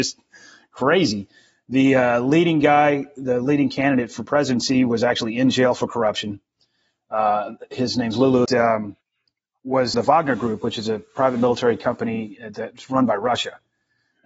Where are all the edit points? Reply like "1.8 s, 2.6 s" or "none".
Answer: 8.4 s, 9.9 s